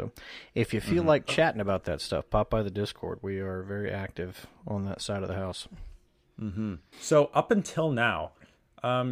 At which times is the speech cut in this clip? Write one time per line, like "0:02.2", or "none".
0:06.9